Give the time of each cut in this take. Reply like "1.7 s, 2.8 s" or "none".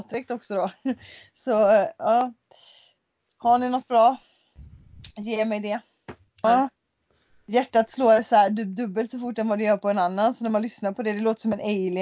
6.4 s